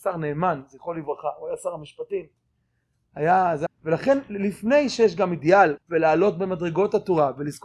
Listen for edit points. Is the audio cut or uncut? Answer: cut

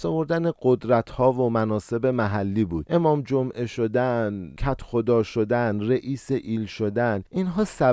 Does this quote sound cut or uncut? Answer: uncut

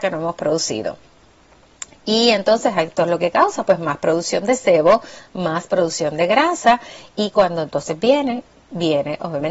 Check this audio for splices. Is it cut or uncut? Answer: uncut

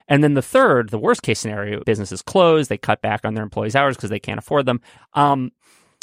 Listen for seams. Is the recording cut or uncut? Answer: cut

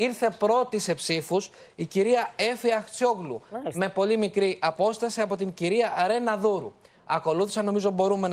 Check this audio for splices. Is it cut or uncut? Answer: uncut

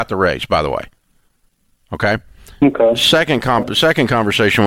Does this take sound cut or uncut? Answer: uncut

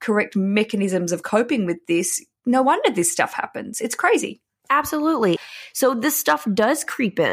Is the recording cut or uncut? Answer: cut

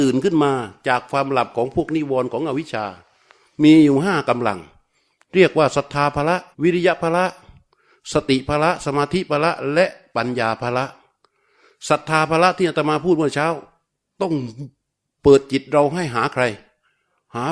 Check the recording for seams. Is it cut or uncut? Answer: cut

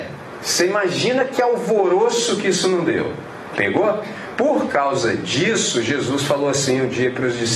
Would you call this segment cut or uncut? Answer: uncut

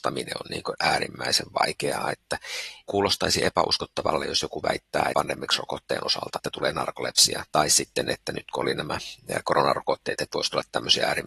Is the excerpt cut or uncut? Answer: cut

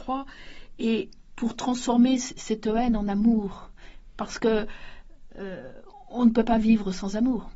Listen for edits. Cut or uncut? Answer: uncut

